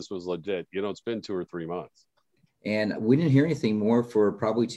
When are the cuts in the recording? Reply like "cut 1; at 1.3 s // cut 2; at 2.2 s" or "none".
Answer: cut 1; at 2.5 s